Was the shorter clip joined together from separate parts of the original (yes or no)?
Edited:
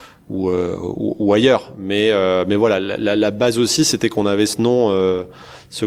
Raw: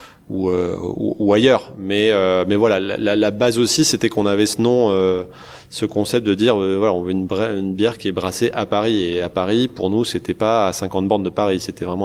no